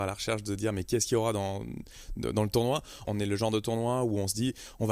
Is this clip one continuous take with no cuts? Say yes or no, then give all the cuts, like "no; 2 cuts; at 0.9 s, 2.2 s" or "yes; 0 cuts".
no; 1 cut; at 3.0 s